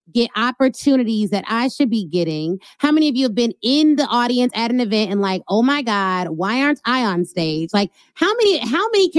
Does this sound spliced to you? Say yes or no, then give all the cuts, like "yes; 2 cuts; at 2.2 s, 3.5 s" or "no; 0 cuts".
no; 0 cuts